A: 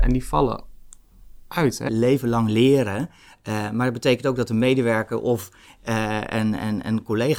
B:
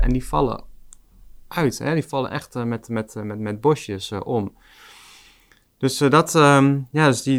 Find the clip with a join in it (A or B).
A